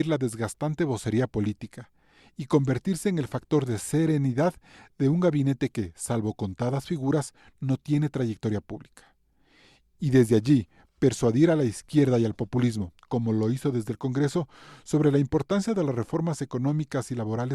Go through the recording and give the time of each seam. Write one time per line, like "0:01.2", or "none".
none

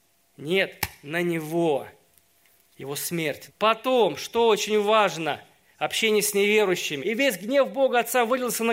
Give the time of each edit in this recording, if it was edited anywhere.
0:03.5
0:07.0

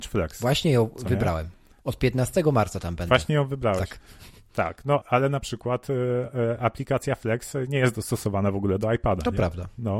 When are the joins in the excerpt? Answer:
0:05.0

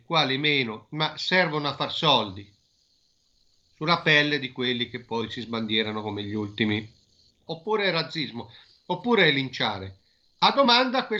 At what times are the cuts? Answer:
0:07.5

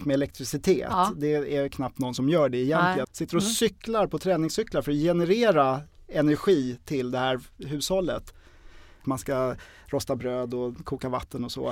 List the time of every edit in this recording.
0:03.0
0:09.0

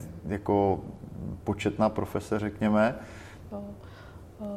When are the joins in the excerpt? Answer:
0:03.5

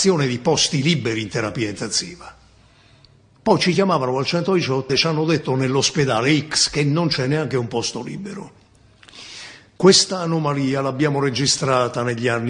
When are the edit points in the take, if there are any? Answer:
0:04.9
0:09.8

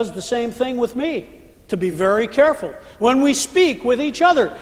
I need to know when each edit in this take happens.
none

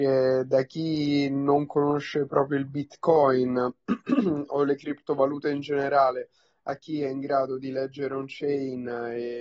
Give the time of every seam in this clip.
none

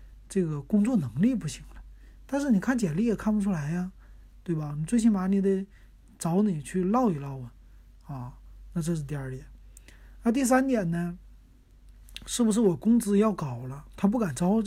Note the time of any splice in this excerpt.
none

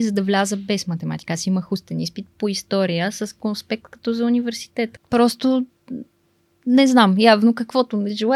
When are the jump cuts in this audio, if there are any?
0:05.0

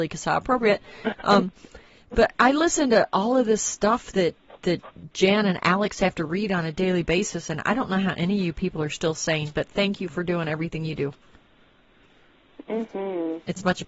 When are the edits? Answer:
none

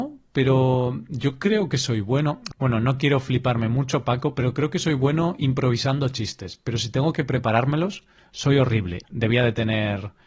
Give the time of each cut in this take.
0:09.0

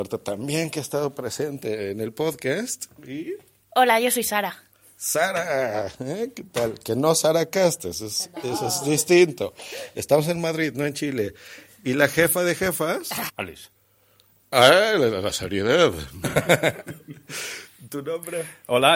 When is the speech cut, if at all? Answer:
0:13.3
0:16.2

